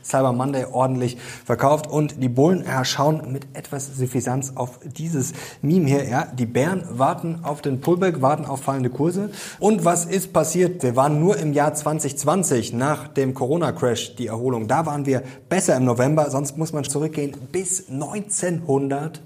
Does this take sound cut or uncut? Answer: cut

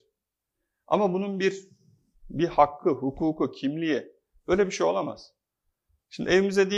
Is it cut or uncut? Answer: uncut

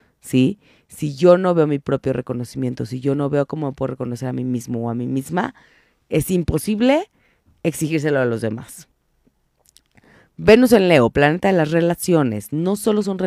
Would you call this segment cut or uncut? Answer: uncut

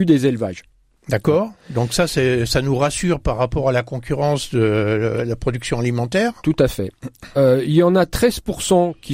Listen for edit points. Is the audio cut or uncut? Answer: uncut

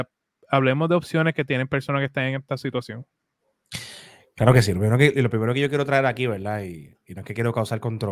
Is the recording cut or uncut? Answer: uncut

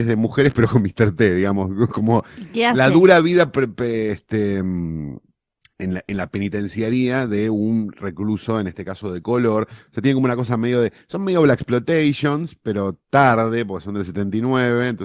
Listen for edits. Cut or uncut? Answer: uncut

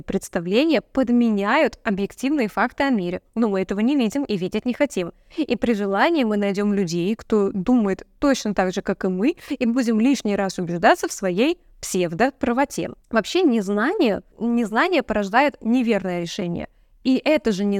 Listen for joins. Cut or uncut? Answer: cut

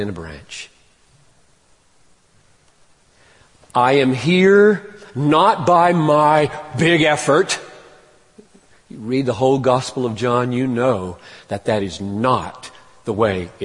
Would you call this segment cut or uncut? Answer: uncut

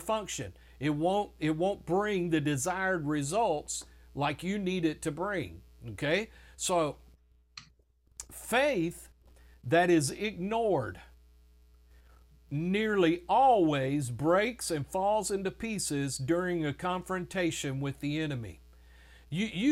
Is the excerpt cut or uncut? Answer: uncut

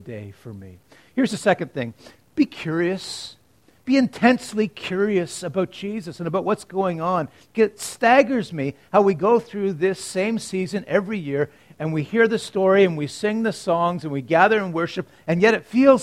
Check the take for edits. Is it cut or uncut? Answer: uncut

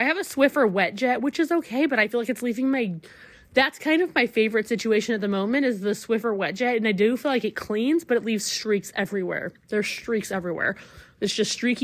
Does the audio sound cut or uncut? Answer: uncut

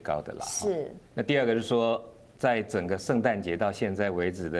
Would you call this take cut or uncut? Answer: cut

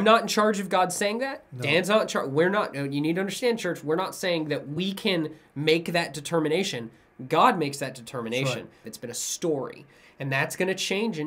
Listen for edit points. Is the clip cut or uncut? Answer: cut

